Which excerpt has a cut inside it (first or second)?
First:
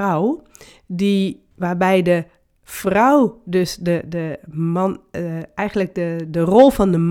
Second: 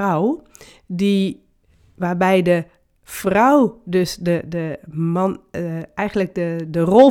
first